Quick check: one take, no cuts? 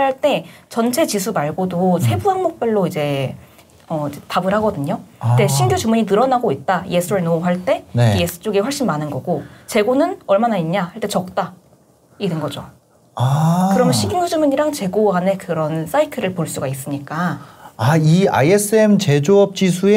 yes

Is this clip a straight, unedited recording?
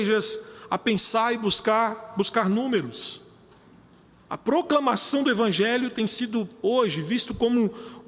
yes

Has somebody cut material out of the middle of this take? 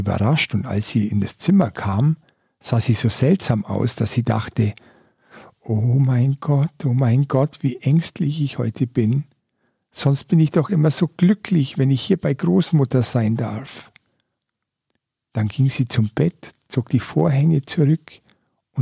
no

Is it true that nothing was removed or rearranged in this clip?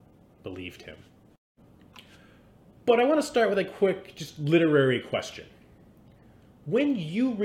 no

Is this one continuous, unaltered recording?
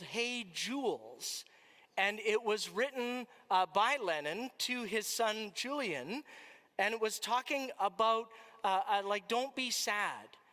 yes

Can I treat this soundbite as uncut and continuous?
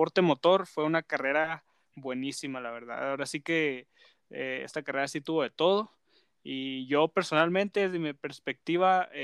yes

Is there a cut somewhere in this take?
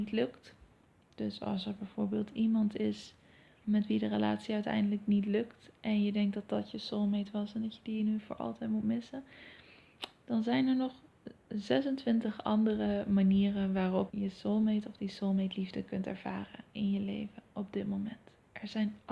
yes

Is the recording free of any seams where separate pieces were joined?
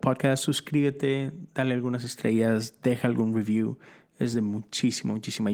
yes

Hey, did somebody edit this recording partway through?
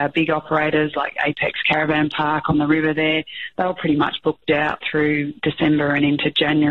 no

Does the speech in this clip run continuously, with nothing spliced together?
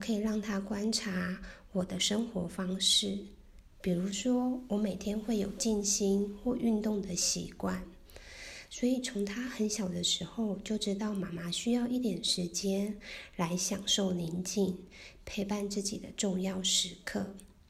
yes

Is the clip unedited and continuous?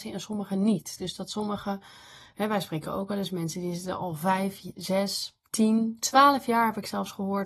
yes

